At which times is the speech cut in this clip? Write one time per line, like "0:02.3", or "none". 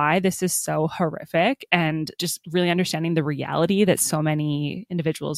0:02.1